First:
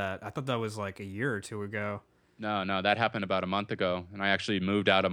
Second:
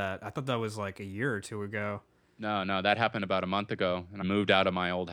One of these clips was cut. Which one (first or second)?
second